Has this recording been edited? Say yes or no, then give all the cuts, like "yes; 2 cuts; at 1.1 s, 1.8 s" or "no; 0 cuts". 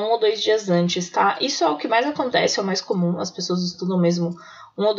no; 0 cuts